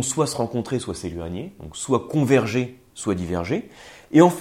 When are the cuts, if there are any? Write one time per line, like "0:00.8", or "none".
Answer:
none